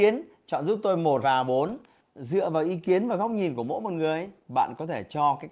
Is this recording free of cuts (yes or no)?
no